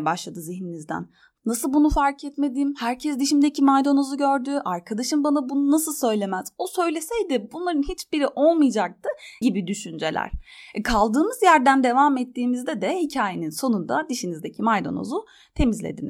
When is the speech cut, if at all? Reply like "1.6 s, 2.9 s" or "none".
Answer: 9.4 s

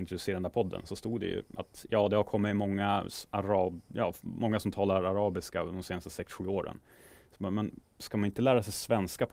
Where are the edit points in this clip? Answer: none

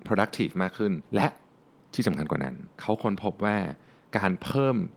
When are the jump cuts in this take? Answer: 1.1 s, 2.7 s

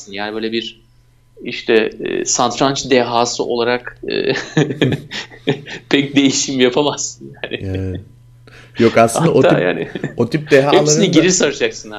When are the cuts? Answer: 4.0 s

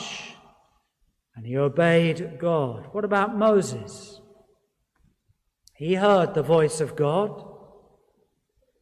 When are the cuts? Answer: none

